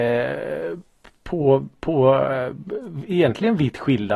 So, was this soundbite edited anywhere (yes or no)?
no